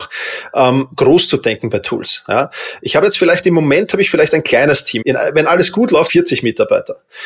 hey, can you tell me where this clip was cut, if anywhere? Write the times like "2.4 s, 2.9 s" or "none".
5.0 s, 6.1 s